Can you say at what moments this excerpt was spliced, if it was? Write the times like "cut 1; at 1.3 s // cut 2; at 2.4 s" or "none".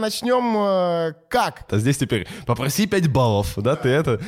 cut 1; at 1.7 s